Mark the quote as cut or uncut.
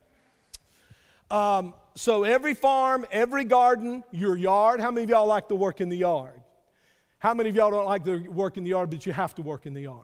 uncut